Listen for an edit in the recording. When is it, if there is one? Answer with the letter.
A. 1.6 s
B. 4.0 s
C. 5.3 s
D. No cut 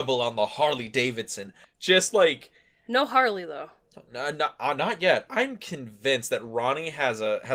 A